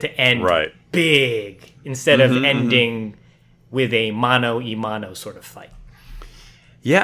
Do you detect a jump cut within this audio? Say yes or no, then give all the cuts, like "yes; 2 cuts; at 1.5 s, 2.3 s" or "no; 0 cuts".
no; 0 cuts